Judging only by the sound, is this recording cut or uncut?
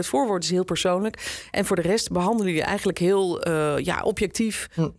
uncut